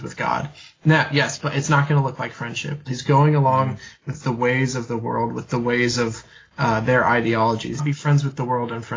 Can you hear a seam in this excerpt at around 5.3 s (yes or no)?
no